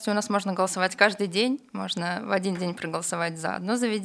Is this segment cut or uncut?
uncut